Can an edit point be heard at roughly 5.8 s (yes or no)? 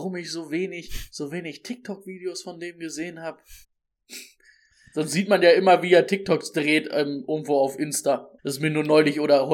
no